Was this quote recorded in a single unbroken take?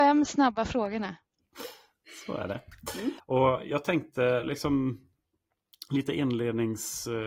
no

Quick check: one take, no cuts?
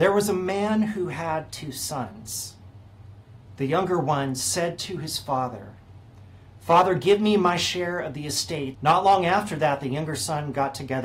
no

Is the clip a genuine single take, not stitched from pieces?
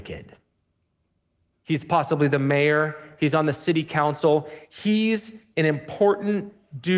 no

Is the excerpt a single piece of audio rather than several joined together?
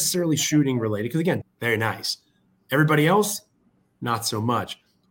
no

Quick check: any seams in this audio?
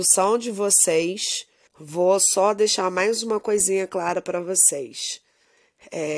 yes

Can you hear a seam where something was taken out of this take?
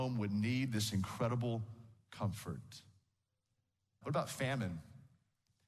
yes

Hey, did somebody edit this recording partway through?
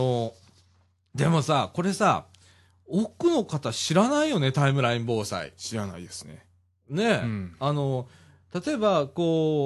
no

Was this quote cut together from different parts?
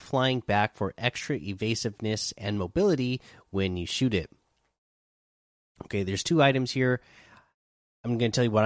no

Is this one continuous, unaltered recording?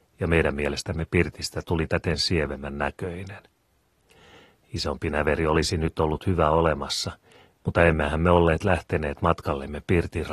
yes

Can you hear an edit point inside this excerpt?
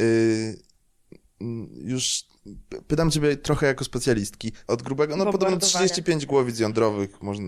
yes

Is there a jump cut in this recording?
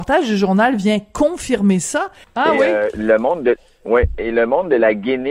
yes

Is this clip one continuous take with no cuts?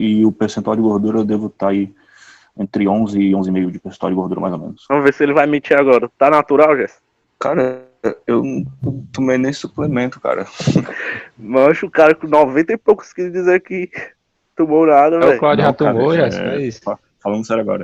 yes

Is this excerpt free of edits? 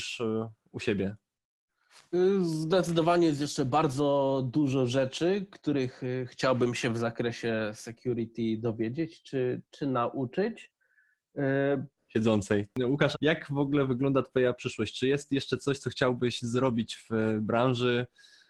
no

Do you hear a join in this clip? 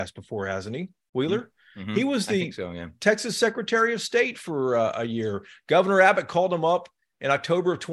no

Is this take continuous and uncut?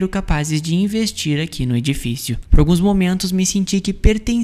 no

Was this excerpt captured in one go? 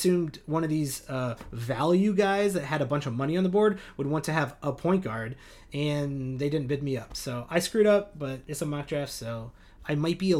yes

